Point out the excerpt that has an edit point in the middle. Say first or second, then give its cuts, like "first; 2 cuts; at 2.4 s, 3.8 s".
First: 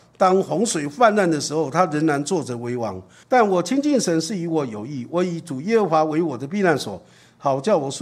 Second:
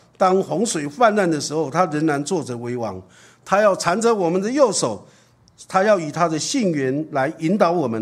first; 1 cut; at 3.2 s